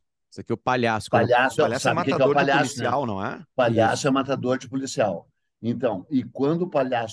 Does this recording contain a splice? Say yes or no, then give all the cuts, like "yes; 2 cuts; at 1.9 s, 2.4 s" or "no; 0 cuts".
yes; 1 cut; at 1.6 s